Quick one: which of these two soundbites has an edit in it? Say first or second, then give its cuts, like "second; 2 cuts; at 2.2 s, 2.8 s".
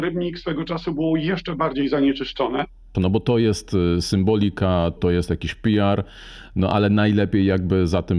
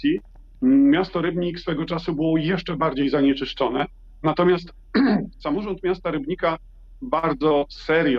first; 2 cuts; at 2.9 s, 5.0 s